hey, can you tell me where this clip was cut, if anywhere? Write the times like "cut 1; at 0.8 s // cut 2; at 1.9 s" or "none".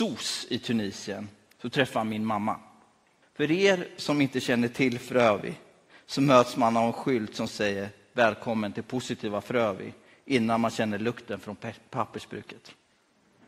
cut 1; at 3.2 s